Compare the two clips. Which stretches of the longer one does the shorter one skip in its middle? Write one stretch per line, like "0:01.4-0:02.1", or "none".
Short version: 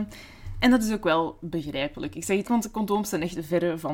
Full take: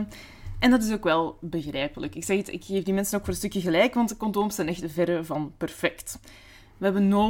0:02.5-0:03.9